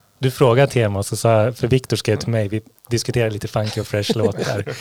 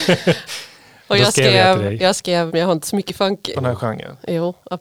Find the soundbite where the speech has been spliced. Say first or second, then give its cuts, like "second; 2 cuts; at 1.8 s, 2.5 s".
second; 2 cuts; at 2.5 s, 3.5 s